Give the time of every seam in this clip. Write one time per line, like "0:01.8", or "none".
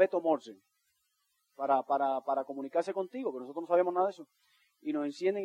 none